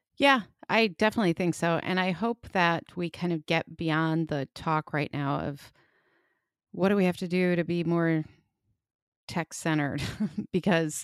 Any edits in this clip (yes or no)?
no